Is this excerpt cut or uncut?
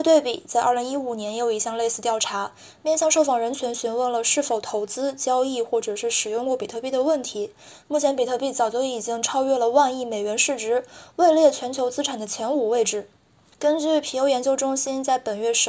cut